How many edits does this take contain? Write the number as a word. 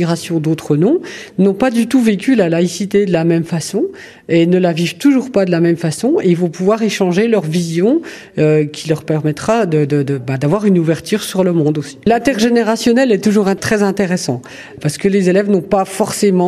zero